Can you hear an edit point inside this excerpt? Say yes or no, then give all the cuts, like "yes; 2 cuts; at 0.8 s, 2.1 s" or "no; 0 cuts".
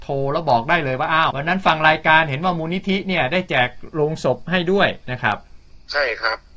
yes; 1 cut; at 1.3 s